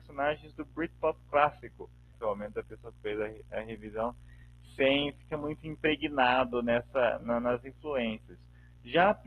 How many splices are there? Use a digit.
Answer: 1